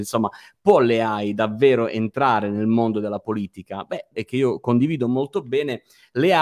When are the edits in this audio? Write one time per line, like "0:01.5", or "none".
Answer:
0:04.1

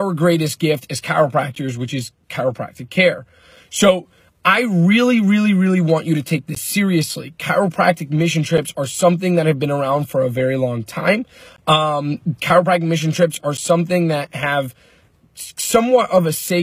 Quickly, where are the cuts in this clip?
none

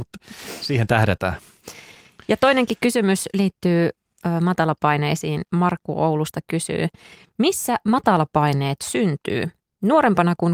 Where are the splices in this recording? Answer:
none

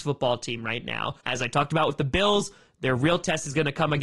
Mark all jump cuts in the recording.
0:01.2

